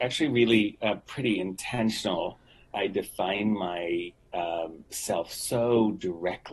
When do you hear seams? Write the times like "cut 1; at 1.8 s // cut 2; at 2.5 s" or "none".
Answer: cut 1; at 2.7 s